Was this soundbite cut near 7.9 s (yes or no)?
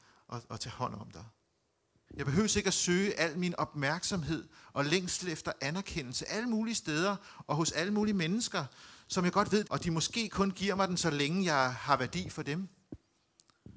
no